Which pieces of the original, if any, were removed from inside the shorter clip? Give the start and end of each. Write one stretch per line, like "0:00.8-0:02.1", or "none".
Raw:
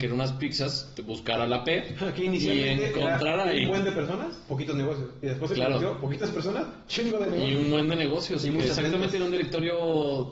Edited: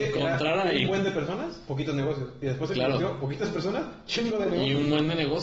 none